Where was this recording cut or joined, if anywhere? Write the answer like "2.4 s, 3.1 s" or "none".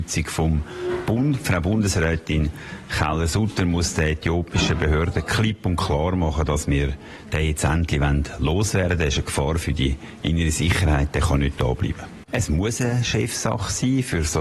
12.3 s